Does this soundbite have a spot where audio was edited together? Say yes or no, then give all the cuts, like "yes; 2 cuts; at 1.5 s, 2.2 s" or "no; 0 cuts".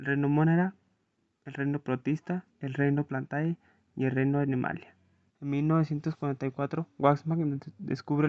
yes; 2 cuts; at 2.5 s, 5.3 s